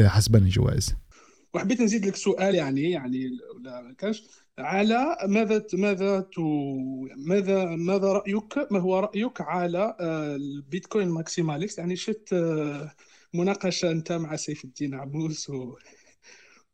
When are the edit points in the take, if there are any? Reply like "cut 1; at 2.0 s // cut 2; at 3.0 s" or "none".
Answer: none